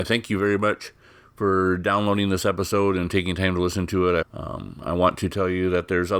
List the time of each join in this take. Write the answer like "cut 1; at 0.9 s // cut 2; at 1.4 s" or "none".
cut 1; at 4.2 s